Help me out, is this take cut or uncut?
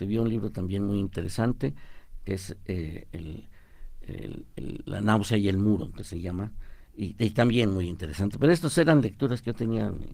uncut